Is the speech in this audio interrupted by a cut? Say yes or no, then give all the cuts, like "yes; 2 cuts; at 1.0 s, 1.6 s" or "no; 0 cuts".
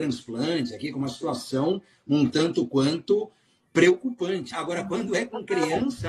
yes; 1 cut; at 4.5 s